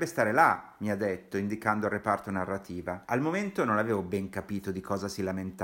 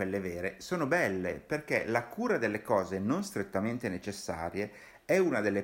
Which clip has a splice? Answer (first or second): first